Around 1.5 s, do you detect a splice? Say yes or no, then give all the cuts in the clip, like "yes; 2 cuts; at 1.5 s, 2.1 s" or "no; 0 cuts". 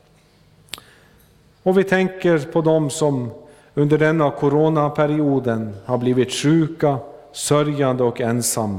yes; 1 cut; at 1.5 s